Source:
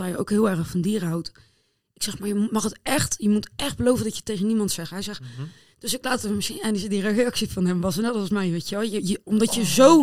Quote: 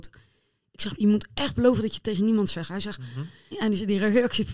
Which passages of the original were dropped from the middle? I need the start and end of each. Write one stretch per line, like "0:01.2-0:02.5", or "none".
0:02.2-0:03.2
0:05.7-0:06.5